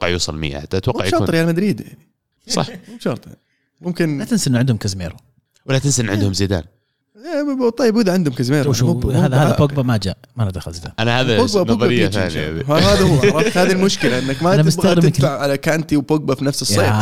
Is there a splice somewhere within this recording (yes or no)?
no